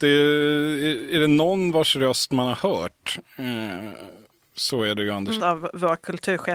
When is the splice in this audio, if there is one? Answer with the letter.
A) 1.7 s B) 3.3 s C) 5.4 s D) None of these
C